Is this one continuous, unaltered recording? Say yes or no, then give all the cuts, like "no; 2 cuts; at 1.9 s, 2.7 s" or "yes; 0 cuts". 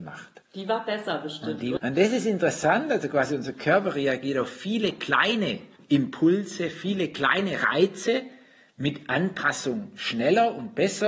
no; 1 cut; at 1.8 s